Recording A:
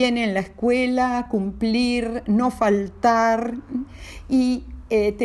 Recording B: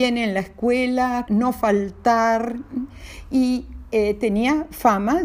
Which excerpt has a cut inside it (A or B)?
B